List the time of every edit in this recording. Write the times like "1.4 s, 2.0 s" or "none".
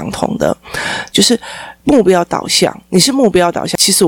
1.1 s